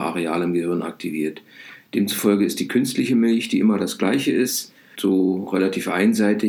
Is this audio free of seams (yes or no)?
no